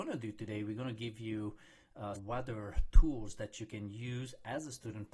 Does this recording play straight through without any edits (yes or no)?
no